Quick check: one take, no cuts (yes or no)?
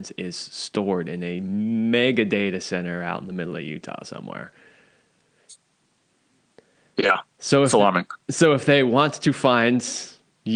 yes